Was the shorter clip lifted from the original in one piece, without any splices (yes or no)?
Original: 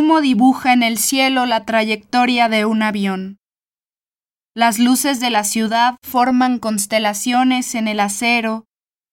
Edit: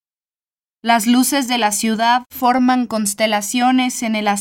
yes